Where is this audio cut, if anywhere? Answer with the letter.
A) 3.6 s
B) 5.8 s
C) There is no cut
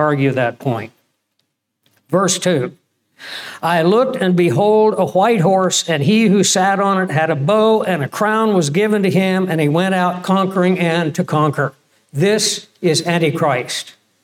C